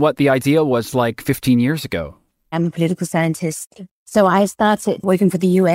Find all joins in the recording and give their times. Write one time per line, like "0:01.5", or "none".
0:02.5
0:03.9